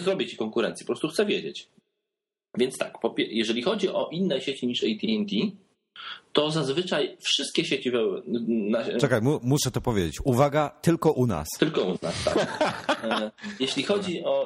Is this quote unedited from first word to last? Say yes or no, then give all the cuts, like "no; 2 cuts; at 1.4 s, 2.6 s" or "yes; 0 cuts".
yes; 0 cuts